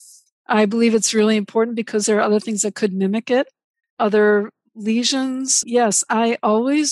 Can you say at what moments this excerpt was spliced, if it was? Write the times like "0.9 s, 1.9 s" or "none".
3.8 s, 5.6 s